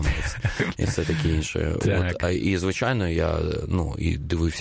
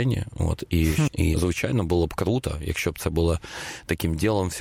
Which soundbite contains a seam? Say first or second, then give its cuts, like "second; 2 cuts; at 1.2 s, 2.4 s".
second; 1 cut; at 1.1 s